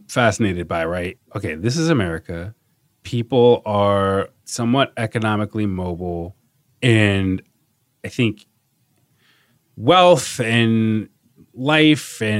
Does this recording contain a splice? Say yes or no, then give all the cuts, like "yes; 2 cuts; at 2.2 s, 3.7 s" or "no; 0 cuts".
yes; 2 cuts; at 1.2 s, 4.4 s